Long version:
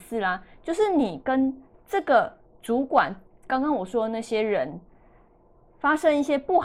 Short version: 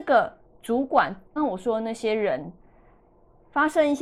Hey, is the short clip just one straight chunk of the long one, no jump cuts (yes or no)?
no